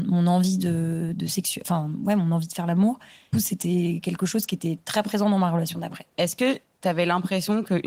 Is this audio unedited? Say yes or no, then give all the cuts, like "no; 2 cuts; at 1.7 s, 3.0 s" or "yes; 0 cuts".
no; 2 cuts; at 3.3 s, 6.1 s